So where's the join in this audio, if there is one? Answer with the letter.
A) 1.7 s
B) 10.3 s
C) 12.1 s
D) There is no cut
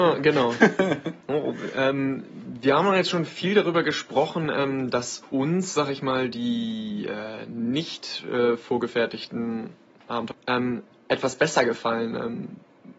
B